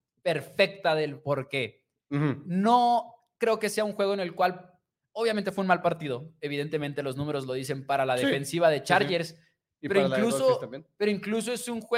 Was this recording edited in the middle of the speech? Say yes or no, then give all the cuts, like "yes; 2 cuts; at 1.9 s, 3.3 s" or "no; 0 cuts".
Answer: no; 0 cuts